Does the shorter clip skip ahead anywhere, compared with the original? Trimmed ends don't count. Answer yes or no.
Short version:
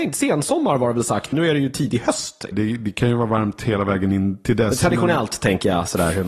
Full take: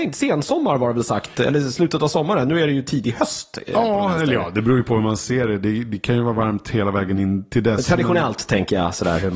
yes